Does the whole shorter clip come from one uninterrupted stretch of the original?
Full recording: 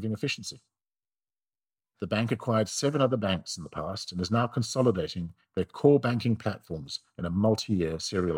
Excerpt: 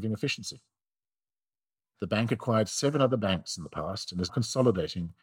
no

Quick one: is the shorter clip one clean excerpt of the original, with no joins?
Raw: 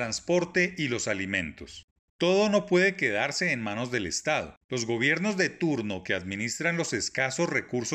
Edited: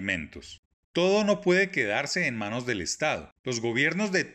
yes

